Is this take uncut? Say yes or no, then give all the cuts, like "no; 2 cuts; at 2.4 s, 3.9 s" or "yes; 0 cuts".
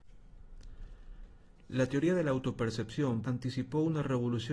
no; 1 cut; at 3.2 s